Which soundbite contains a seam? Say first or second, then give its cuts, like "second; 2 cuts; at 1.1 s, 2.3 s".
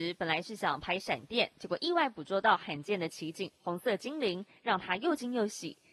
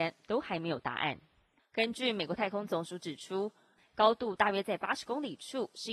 second; 2 cuts; at 1.6 s, 3.8 s